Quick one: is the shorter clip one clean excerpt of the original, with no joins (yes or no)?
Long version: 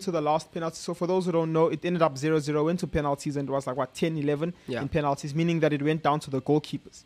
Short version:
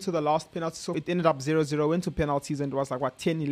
no